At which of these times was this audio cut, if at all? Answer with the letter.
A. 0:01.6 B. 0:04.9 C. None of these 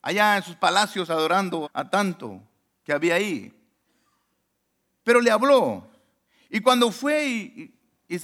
A